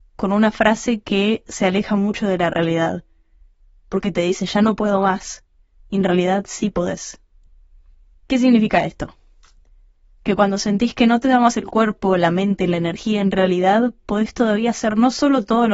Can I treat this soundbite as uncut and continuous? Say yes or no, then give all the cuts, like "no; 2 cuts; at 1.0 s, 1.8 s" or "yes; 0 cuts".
yes; 0 cuts